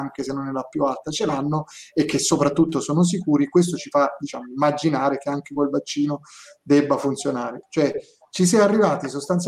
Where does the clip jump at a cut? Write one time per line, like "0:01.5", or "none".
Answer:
0:07.6